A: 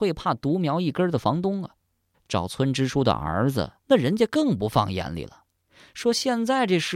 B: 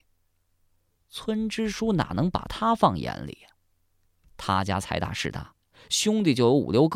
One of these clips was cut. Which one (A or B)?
A